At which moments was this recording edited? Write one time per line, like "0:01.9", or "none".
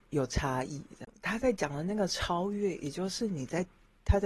none